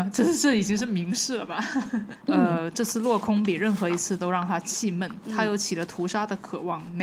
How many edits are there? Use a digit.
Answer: 1